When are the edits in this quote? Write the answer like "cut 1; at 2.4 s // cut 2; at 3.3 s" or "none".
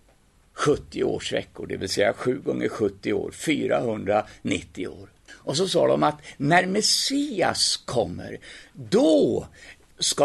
cut 1; at 5.3 s